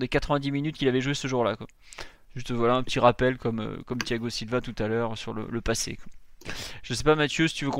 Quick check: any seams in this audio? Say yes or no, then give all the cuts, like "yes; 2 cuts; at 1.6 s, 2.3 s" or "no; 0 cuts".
no; 0 cuts